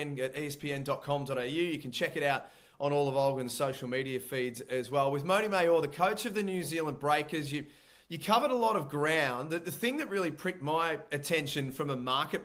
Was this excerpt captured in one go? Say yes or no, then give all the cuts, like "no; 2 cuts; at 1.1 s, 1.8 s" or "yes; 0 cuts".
yes; 0 cuts